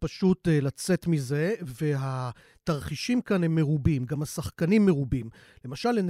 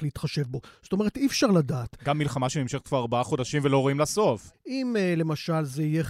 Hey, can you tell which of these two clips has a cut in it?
second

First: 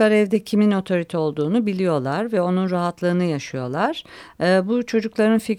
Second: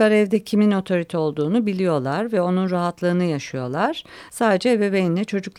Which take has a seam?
second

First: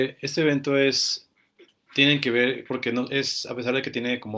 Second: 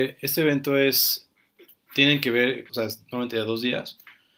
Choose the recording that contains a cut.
second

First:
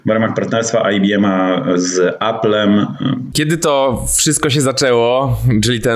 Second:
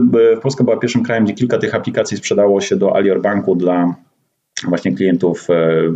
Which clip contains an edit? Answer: first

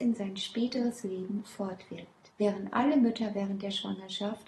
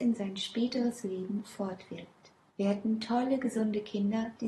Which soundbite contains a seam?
first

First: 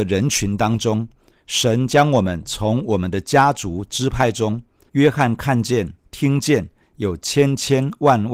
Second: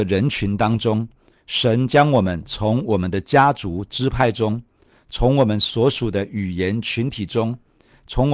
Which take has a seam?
first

